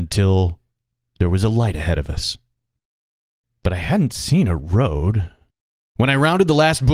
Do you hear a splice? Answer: no; 0 cuts

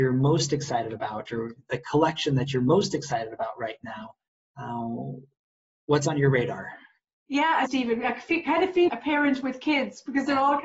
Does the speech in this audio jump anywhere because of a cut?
yes; 2 cuts; at 7.7 s, 8.9 s

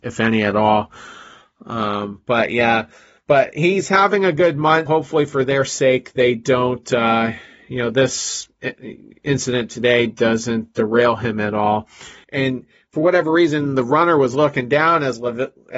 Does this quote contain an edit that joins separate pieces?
yes; 2 cuts; at 4.9 s, 12.2 s

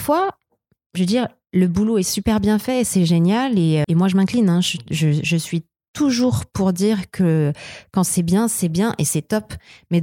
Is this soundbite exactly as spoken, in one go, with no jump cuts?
no; 1 cut; at 3.8 s

